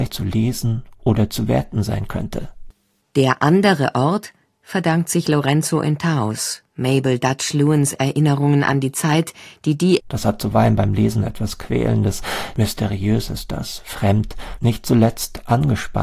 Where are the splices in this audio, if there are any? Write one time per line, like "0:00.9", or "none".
0:10.0
0:14.6